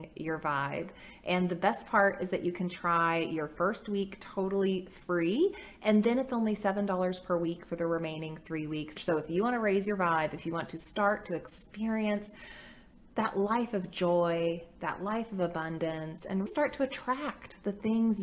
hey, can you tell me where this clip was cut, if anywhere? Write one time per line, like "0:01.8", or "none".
0:09.0
0:16.5